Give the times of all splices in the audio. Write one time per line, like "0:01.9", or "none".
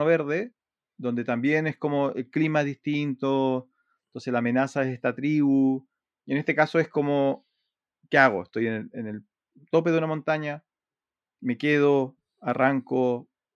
none